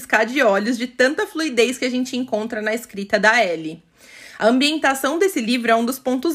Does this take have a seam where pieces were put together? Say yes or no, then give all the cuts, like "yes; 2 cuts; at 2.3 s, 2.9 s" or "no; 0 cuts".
no; 0 cuts